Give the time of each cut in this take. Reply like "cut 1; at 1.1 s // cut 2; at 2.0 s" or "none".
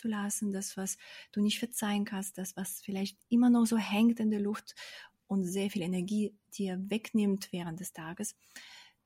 none